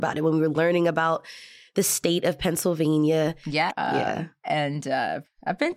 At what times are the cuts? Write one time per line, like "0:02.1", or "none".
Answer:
0:03.7